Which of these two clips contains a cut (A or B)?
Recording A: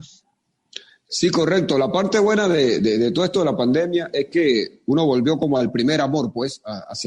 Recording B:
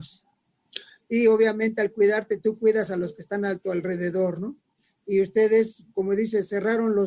B